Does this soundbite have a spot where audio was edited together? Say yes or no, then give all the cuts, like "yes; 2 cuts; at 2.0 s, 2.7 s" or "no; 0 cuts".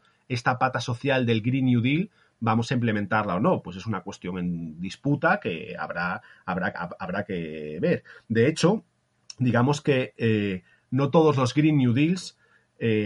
yes; 1 cut; at 6.7 s